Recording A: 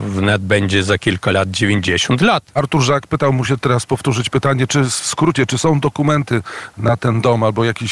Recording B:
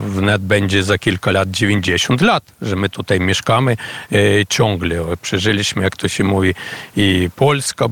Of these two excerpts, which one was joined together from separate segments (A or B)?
A